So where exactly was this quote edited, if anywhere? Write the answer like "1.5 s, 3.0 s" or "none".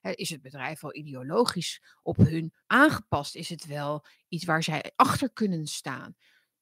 2.6 s

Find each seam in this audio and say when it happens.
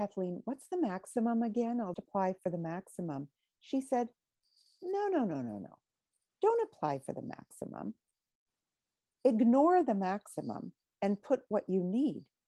1.9 s

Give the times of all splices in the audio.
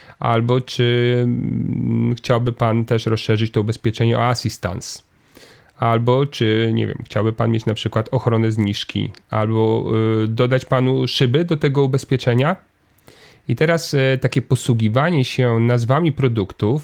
none

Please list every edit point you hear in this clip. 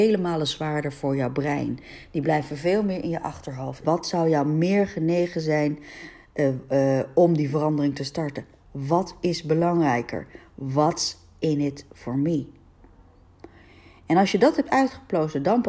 3.8 s

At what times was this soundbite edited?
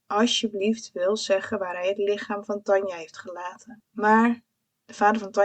none

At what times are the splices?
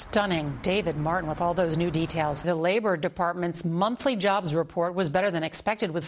2.4 s

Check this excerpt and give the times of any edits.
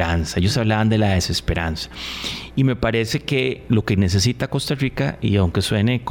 none

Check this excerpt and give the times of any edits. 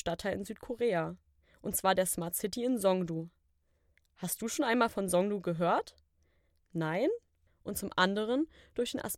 7.5 s

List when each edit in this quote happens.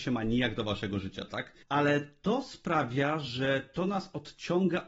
1.6 s

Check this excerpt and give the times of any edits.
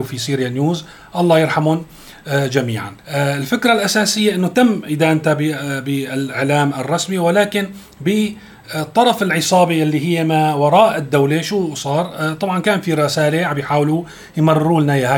3.0 s

